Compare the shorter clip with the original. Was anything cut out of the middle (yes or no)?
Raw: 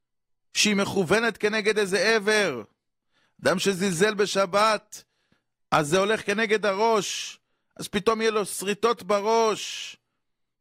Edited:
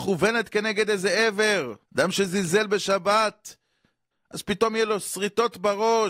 yes